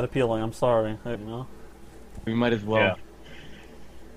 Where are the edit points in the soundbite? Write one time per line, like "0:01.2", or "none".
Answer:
0:01.2
0:02.3